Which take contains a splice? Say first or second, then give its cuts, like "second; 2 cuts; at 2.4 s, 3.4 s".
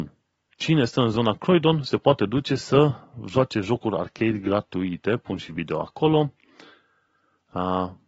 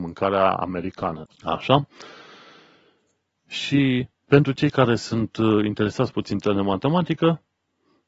second; 1 cut; at 1.2 s